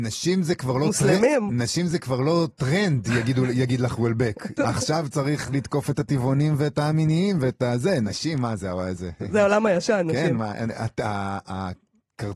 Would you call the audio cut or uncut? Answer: cut